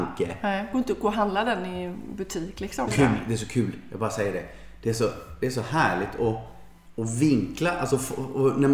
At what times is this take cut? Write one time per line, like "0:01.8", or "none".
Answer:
0:02.9